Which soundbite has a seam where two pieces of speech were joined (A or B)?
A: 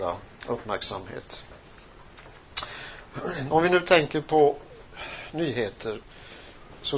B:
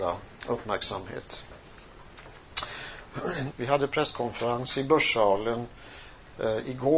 B